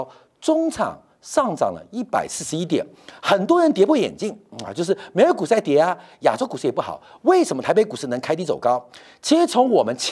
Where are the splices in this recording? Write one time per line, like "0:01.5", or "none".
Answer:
none